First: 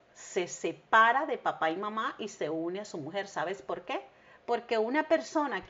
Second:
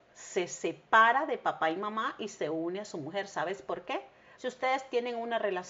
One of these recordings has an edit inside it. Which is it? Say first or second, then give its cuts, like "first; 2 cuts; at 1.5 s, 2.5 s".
second; 1 cut; at 4.3 s